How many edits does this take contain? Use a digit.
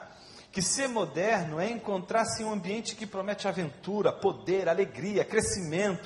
0